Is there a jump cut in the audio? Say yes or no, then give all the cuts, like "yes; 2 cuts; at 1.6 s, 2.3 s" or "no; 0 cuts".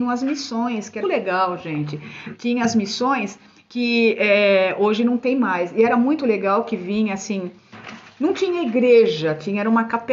yes; 1 cut; at 1.0 s